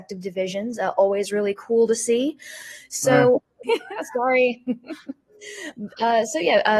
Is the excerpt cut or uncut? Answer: cut